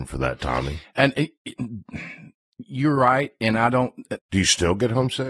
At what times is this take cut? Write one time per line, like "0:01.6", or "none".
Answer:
0:04.2